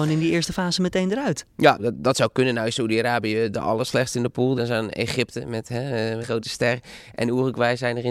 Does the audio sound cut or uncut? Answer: cut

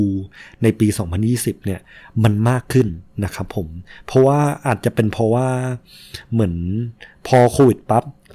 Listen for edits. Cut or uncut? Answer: uncut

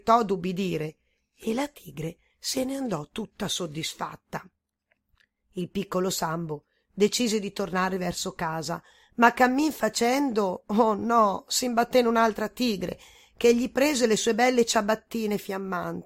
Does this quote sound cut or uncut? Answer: uncut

